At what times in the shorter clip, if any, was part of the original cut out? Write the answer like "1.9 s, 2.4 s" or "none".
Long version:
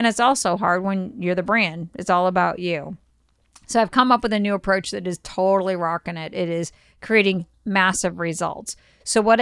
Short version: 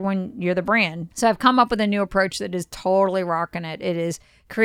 1.1 s